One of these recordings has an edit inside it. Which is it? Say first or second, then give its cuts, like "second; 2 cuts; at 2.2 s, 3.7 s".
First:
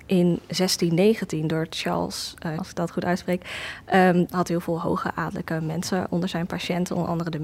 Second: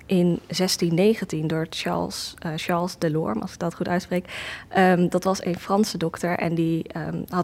first; 2 cuts; at 2.6 s, 4.3 s